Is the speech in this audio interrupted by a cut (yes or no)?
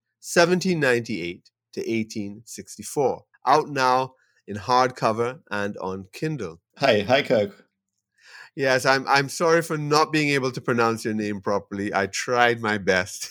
yes